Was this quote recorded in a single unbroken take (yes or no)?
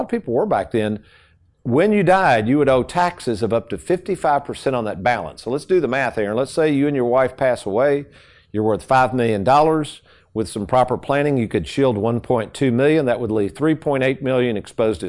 yes